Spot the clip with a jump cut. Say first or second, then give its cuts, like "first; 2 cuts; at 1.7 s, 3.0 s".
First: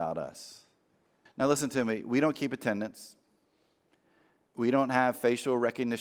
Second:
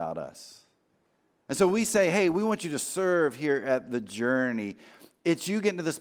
first; 1 cut; at 1.3 s